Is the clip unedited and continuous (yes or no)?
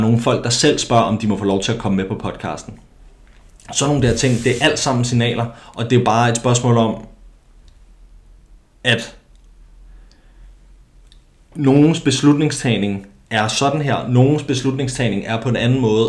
yes